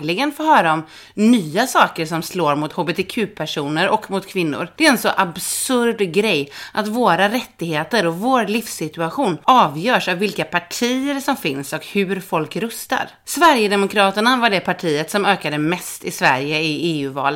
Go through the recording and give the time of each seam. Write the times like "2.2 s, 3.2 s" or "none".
none